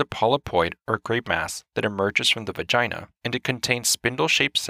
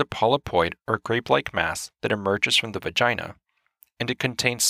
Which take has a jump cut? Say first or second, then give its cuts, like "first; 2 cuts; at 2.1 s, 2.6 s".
first; 2 cuts; at 1.2 s, 3.1 s